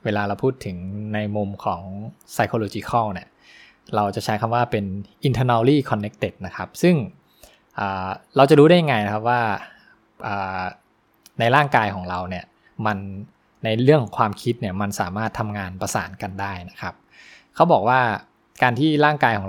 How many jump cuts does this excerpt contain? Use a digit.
0